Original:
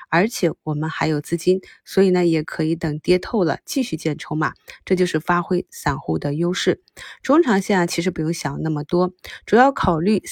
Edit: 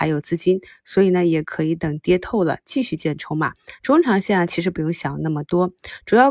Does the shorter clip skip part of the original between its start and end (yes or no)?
yes